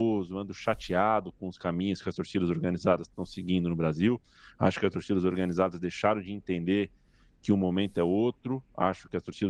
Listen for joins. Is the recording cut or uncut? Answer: uncut